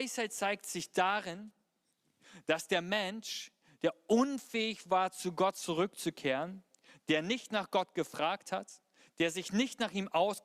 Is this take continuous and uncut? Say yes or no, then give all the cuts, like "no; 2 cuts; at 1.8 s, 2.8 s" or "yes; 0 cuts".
yes; 0 cuts